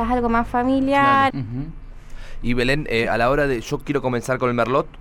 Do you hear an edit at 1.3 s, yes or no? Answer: yes